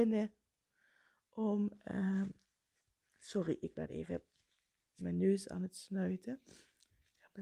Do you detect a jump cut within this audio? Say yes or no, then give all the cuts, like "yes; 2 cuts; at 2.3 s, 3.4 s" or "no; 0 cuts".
no; 0 cuts